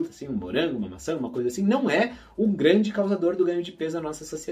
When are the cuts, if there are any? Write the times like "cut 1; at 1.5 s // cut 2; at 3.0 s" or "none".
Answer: none